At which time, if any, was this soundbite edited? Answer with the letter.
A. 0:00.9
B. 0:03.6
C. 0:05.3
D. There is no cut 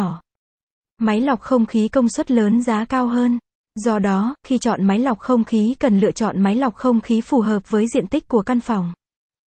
D